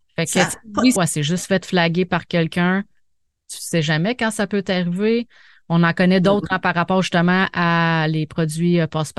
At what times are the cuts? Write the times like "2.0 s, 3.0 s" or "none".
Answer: 1.0 s